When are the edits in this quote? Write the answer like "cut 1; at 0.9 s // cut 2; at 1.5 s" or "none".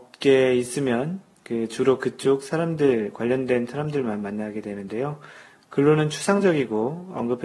cut 1; at 5.6 s

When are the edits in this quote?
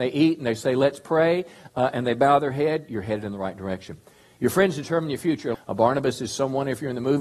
cut 1; at 5.5 s

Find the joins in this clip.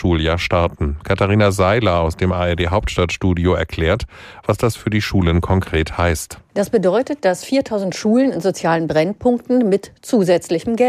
none

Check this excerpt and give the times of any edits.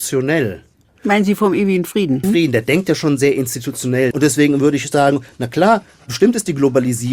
cut 1; at 2.2 s // cut 2; at 4.1 s

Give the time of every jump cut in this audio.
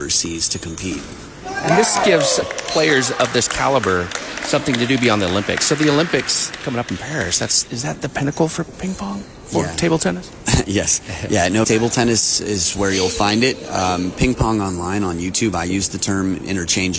cut 1; at 11.6 s

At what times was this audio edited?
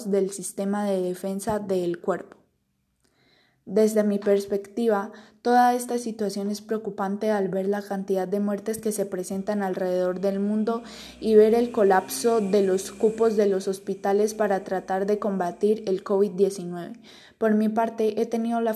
none

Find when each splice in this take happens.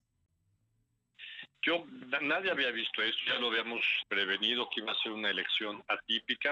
cut 1; at 4.0 s

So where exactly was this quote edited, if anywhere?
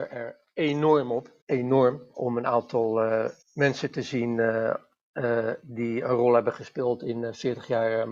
cut 1; at 1.4 s // cut 2; at 3.4 s

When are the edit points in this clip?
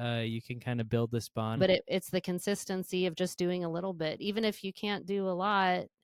cut 1; at 1.6 s

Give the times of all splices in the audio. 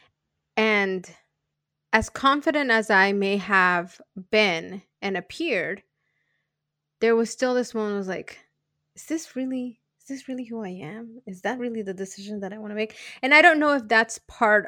none

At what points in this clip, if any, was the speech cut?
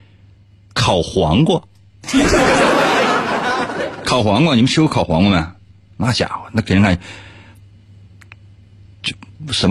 none

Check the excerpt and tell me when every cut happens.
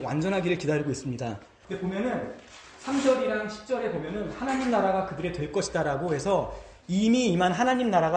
cut 1; at 1.6 s

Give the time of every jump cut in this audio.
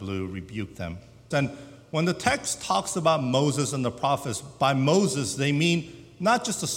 cut 1; at 1.3 s

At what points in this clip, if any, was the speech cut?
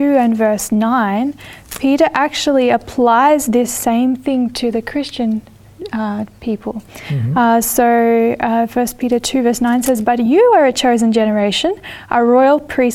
none

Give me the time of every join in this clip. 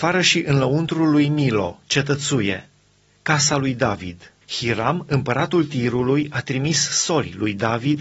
cut 1; at 3.1 s // cut 2; at 4.4 s

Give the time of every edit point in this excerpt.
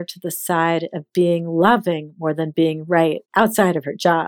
cut 1; at 3.3 s

